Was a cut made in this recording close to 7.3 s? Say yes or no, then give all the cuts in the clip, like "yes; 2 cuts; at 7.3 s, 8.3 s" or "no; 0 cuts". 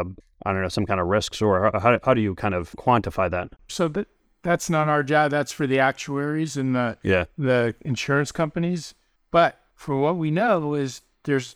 no; 1 cut; at 3.7 s